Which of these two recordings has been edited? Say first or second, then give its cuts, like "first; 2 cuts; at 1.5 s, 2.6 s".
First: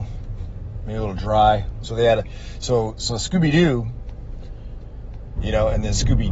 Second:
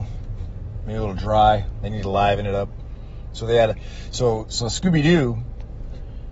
first; 2 cuts; at 1.8 s, 5.4 s